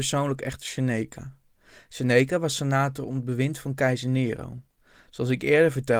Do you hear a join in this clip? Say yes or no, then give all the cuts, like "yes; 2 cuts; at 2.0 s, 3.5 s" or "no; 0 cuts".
no; 0 cuts